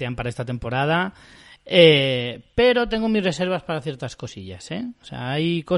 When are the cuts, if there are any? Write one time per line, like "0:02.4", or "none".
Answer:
none